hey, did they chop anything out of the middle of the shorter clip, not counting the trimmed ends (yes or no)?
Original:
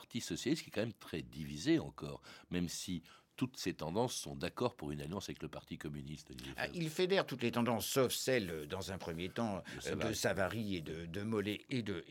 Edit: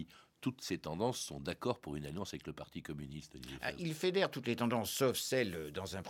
no